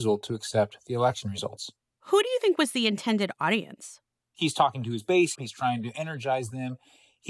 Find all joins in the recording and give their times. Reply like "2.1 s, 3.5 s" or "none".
5.3 s